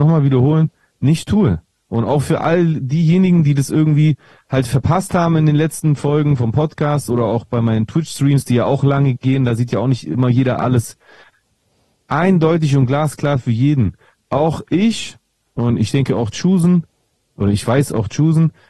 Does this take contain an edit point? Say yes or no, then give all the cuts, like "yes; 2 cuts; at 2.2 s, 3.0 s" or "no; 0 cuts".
no; 0 cuts